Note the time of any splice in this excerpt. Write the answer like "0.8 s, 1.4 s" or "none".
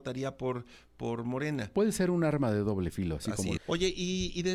3.6 s